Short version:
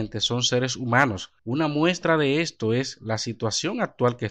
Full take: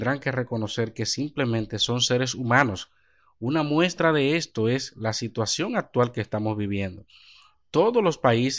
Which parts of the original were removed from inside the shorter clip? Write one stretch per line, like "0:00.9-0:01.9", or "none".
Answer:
0:03.0-0:03.3